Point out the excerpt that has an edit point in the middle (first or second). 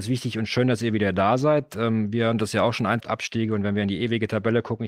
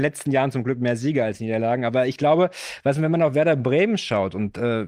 first